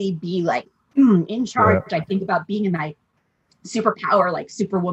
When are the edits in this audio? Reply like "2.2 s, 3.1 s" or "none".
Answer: none